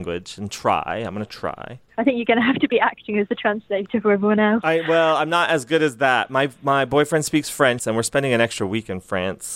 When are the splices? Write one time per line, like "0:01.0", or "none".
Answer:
0:07.8